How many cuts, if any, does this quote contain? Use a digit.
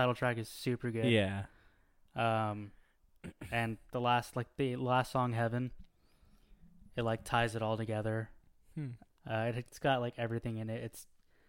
1